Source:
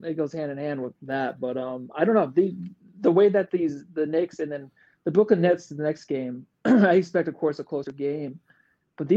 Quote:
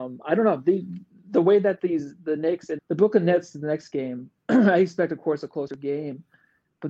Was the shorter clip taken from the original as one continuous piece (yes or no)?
no